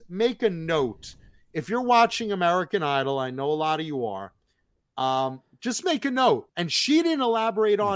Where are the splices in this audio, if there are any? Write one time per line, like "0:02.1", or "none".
0:06.5